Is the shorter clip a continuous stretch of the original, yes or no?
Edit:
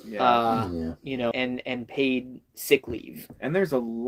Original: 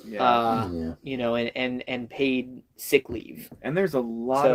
no